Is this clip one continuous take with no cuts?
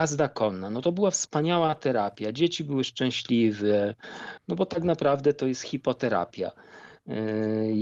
no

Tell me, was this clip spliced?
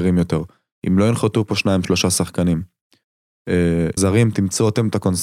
yes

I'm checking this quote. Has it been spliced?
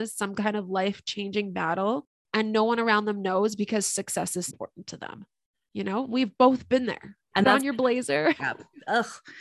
yes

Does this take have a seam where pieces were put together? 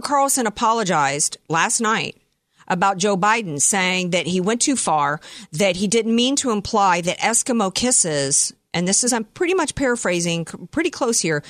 no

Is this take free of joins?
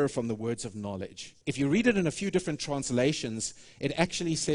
no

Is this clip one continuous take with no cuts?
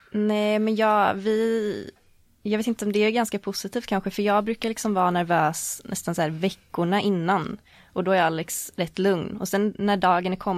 yes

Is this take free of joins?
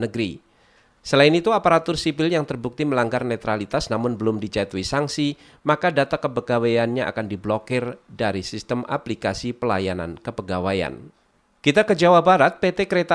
yes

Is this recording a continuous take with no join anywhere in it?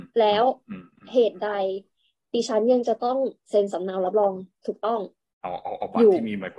yes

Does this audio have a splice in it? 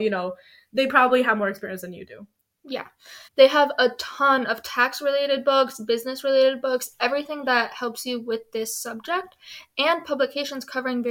yes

